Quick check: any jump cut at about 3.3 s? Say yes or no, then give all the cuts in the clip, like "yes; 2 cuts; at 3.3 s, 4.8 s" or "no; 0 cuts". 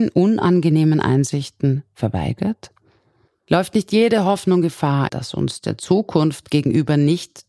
yes; 2 cuts; at 3.3 s, 5.1 s